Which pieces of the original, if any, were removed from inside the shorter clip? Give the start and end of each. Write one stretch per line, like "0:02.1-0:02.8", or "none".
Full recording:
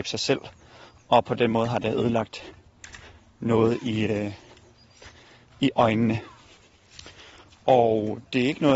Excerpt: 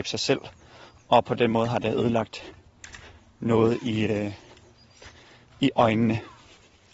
none

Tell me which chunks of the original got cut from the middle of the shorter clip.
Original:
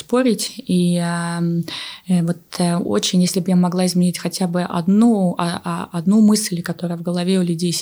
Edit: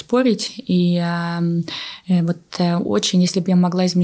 none

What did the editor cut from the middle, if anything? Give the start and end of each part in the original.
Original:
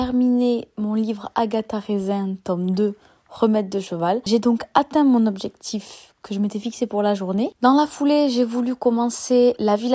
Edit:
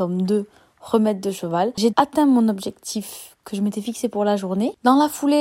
0:04.4-0:04.7

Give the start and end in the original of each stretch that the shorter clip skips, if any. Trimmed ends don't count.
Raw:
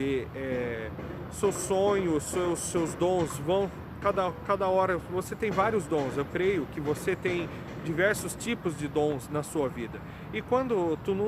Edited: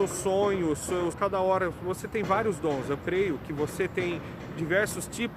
0:02.6-0:04.4

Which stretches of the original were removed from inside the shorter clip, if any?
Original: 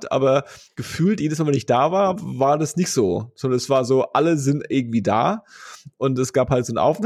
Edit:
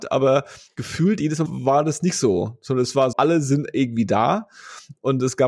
0:01.5-0:02.2
0:03.9-0:04.1

